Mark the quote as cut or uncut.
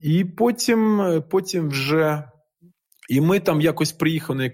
cut